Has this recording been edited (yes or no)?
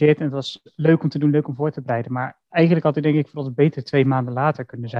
no